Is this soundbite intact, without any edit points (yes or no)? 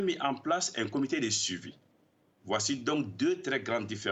yes